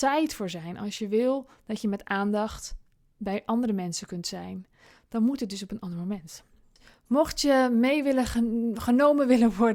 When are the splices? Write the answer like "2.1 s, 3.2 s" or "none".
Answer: none